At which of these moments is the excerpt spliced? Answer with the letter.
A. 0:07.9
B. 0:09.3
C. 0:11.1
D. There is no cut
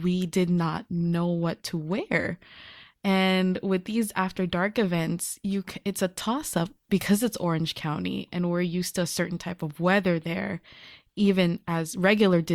D